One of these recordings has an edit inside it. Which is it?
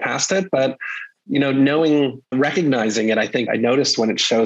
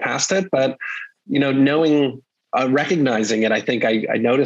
first; 2 cuts; at 2.3 s, 3.5 s

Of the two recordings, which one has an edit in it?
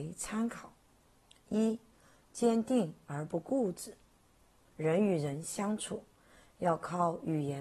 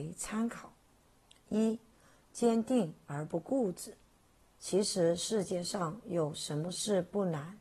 second; 1 cut; at 4.6 s

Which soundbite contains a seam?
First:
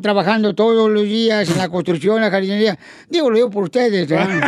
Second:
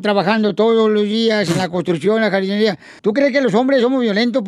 second; 1 cut; at 3.0 s

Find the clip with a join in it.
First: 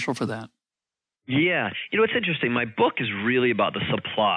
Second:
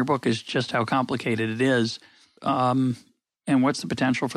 second; 1 cut; at 2.4 s

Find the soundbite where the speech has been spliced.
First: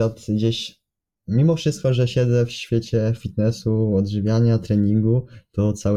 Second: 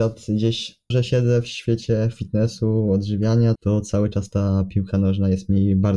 second; 2 cuts; at 0.9 s, 3.6 s

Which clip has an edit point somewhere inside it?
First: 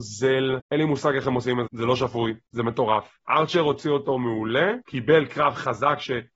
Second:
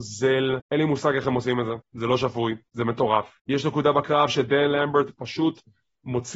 first; 3 cuts; at 1.7 s, 3.2 s, 4.8 s

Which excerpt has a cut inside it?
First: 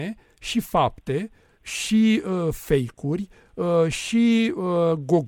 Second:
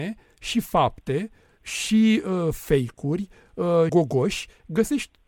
second; 1 cut; at 3.9 s

